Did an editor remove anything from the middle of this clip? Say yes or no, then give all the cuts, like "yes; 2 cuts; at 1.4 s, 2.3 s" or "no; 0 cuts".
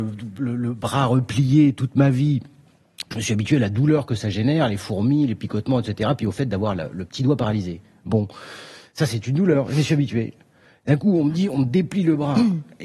no; 0 cuts